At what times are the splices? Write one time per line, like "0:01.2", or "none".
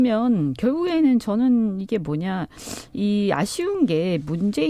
none

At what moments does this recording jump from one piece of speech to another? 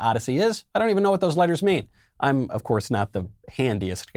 none

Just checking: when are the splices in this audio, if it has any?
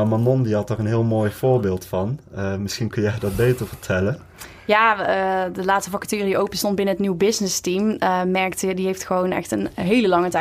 none

